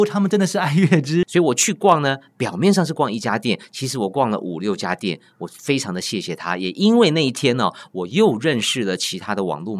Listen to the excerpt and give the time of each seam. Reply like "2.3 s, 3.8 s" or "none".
1.2 s